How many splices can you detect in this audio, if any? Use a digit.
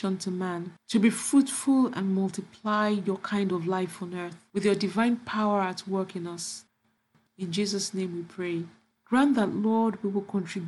1